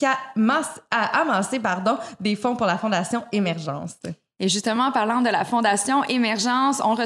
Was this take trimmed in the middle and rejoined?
no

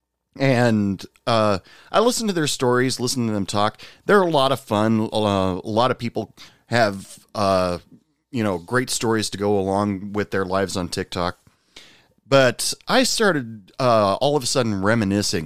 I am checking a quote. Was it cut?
no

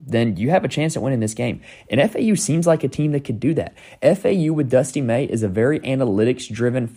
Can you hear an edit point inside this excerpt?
no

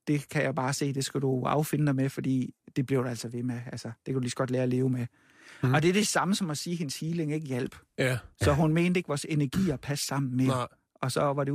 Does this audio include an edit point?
no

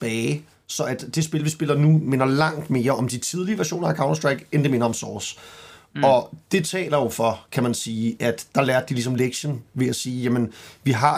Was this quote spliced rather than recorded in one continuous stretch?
no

